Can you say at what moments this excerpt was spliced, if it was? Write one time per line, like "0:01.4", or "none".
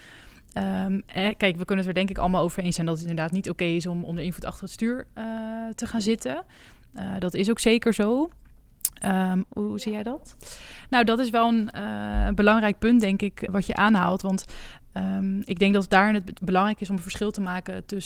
0:09.4
0:13.5

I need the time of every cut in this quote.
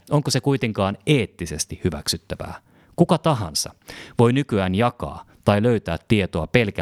none

